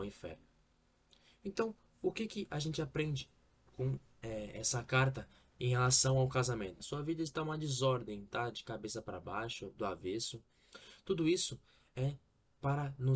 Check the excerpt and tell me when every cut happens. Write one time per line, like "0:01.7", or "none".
0:06.8

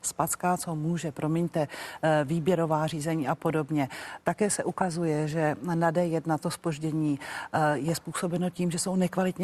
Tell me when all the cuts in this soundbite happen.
none

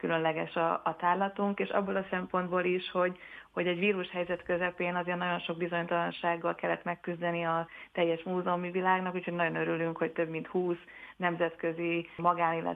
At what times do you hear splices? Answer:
none

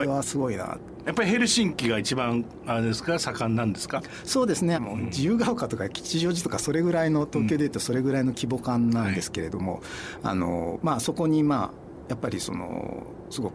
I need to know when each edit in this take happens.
0:01.0
0:04.7

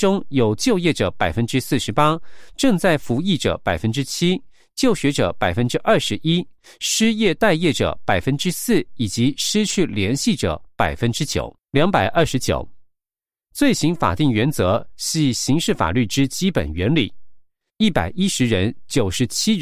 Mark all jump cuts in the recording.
0:11.6
0:17.7

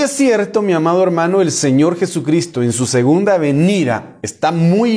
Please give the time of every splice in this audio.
none

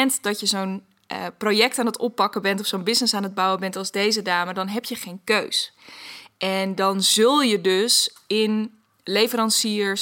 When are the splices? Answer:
none

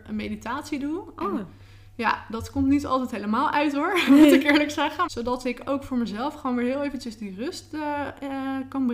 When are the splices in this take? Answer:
0:05.1

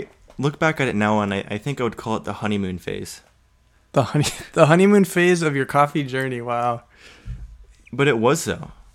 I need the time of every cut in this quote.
none

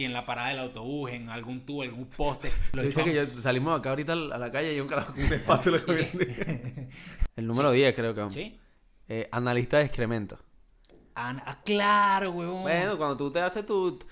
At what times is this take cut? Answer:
none

